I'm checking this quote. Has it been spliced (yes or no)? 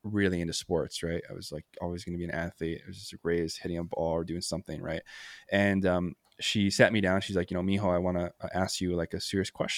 no